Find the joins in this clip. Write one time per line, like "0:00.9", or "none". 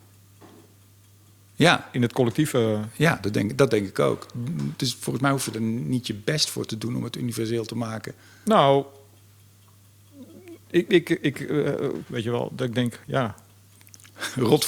0:10.9
0:12.0